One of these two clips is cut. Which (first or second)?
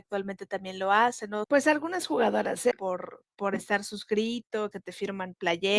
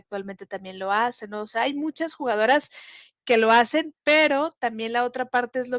first